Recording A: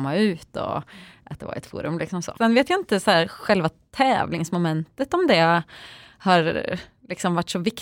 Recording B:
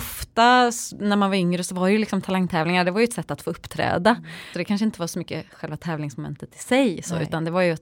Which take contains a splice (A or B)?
A